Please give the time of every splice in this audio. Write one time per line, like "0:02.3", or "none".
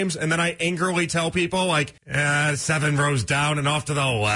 0:02.0